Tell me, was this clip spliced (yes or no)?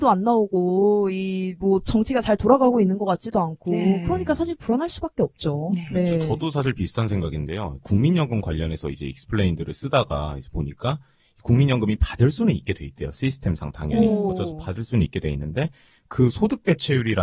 no